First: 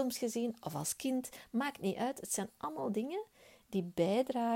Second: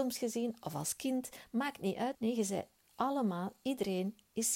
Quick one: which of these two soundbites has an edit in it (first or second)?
second